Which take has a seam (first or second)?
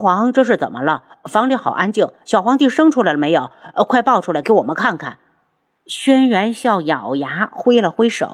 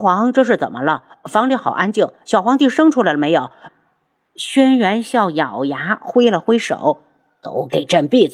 second